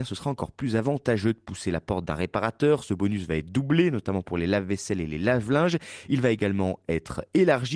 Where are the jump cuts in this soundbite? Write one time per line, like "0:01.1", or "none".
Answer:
none